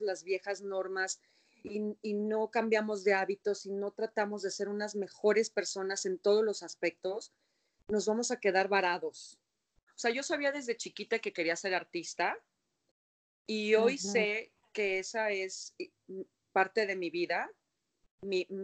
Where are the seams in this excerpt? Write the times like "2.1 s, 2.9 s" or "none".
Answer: 9.9 s